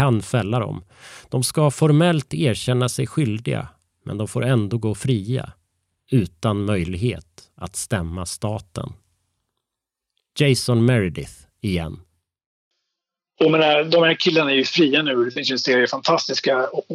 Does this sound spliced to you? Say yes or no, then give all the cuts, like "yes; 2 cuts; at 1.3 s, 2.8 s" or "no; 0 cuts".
no; 0 cuts